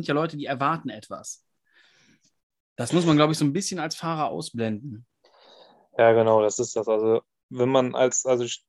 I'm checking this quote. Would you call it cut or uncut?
uncut